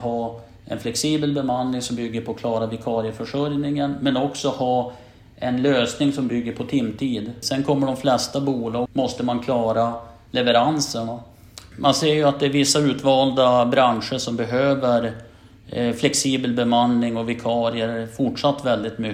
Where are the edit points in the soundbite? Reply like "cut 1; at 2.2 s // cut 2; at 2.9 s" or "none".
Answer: cut 1; at 7.4 s // cut 2; at 8.9 s // cut 3; at 11.7 s